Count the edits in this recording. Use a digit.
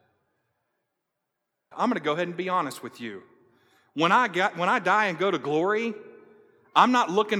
1